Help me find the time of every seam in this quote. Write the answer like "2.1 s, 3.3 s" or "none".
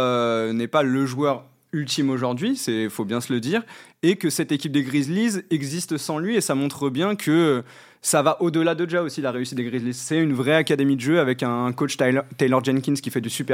none